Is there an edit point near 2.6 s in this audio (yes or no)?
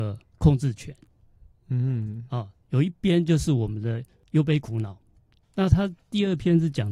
yes